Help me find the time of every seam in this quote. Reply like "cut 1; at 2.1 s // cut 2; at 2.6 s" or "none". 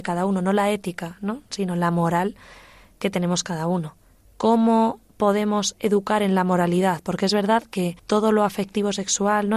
cut 1; at 4.2 s // cut 2; at 8.0 s